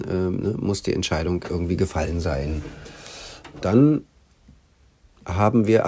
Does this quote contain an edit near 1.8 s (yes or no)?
no